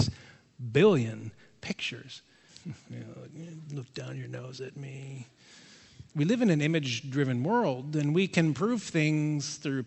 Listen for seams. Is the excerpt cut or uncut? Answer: cut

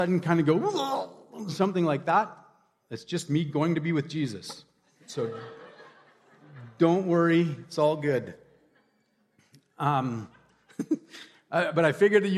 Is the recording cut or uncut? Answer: uncut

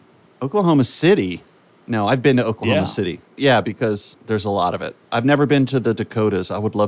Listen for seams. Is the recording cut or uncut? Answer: cut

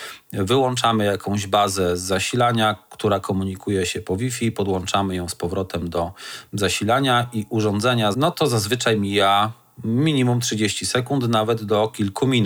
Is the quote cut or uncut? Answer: cut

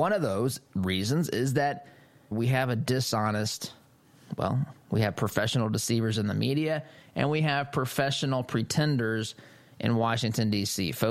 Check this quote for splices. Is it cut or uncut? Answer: cut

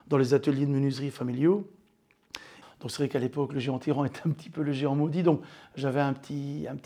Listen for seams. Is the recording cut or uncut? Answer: cut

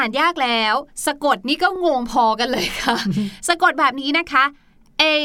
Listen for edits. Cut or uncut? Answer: uncut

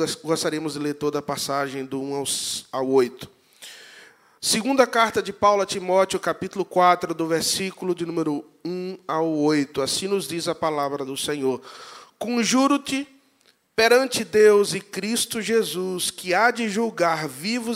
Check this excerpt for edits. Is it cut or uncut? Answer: uncut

